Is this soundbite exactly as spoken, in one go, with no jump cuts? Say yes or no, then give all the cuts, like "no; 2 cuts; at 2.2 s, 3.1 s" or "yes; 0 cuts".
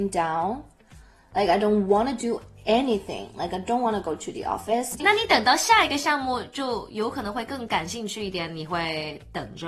no; 1 cut; at 5.0 s